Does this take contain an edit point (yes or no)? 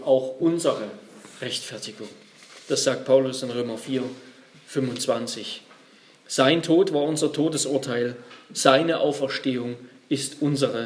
no